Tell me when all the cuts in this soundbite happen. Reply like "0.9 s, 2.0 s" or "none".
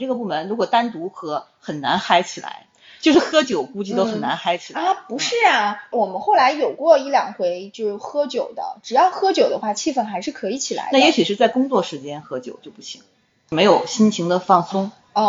none